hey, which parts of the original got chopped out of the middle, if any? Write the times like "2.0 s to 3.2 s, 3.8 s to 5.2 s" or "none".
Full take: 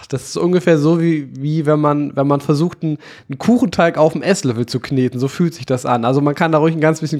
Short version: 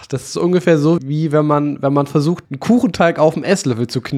1.0 s to 1.3 s, 2.8 s to 3.2 s